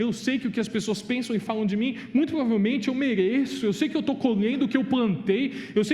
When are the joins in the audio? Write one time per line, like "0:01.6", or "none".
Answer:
none